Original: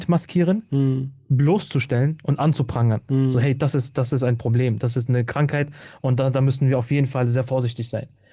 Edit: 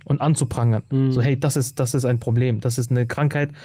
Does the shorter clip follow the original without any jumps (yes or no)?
yes